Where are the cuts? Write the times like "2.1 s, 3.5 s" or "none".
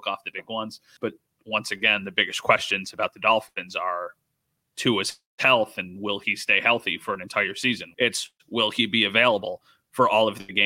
1.0 s, 7.9 s